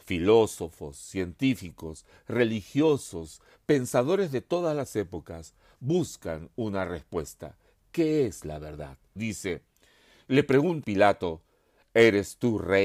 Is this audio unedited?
no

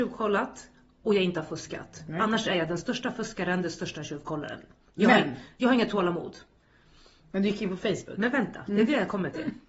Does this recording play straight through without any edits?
yes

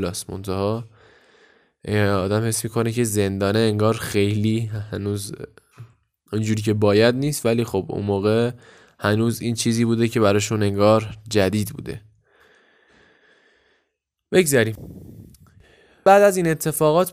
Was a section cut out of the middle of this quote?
no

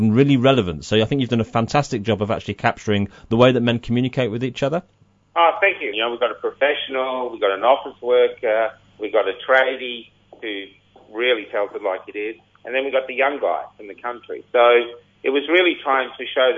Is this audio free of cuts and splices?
no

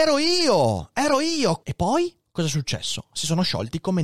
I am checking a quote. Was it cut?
yes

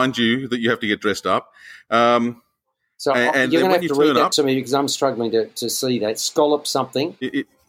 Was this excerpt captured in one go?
yes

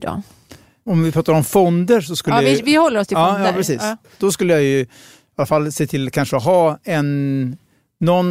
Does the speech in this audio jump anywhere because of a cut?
no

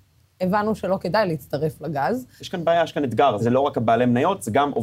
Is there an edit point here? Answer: yes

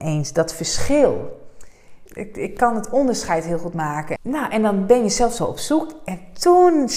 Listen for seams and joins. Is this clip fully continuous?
no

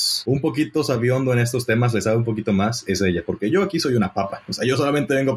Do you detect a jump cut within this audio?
no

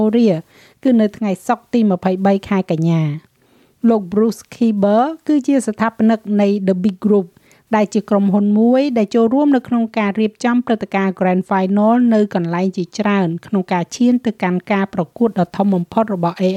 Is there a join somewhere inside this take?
no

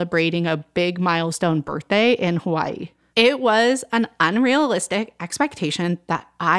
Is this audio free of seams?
no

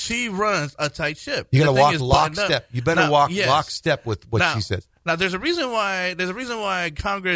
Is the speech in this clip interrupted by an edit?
no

